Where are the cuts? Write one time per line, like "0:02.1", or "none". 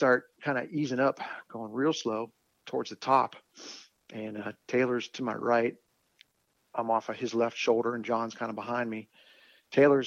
0:04.6

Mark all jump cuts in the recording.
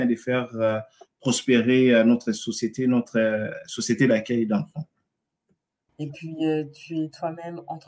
0:05.9

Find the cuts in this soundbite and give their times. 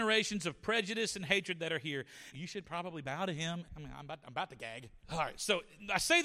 0:02.3
0:03.6
0:05.0

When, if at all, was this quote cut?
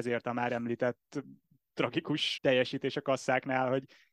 0:02.4

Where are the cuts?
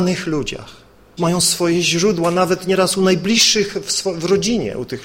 0:01.2

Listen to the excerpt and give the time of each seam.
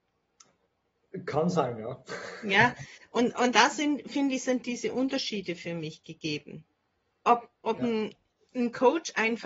none

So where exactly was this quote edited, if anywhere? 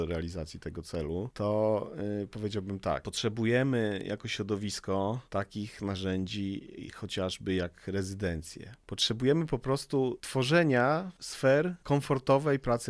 none

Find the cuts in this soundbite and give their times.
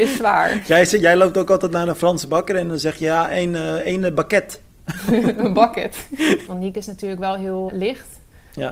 0:06.5
0:07.7

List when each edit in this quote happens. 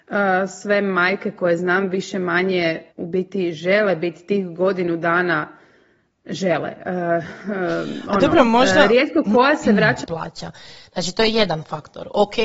0:02.9
0:10.0

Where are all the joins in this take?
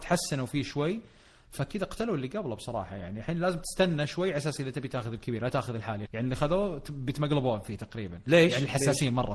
0:06.1

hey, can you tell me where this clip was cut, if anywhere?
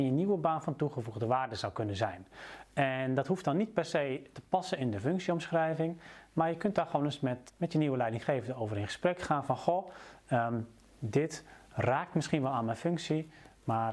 0:07.5

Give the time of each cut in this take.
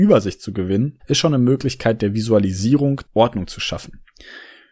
0:01.0
0:03.1

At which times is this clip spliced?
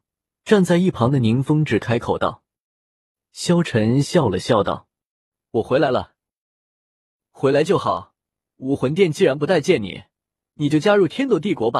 0:05.4

